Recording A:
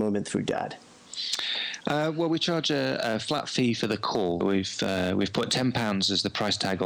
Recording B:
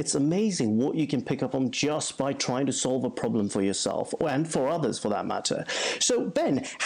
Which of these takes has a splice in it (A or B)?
A